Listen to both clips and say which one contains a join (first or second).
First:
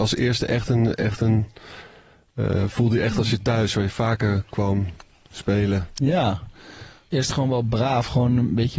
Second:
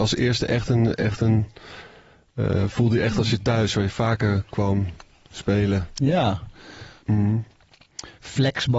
second